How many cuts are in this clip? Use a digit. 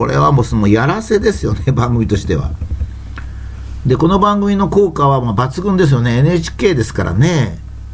0